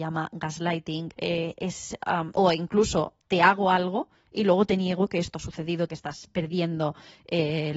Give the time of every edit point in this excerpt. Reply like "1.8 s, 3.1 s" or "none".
1.1 s, 5.9 s